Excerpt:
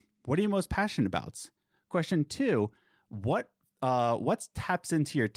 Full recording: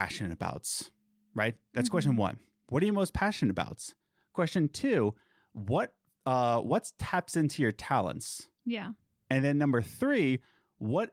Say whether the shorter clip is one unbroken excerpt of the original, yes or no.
yes